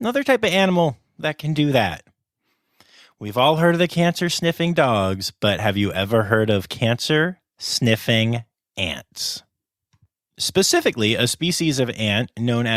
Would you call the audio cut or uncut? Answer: uncut